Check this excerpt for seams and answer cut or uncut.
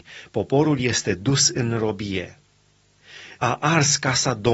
cut